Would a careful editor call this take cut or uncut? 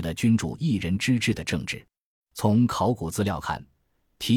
cut